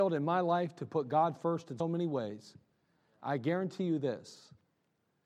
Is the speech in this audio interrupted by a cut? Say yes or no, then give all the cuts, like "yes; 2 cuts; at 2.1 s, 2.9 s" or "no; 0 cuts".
yes; 1 cut; at 1.8 s